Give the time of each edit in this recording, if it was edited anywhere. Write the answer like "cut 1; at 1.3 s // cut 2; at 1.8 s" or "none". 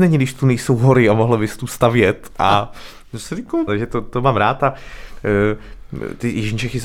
cut 1; at 3.7 s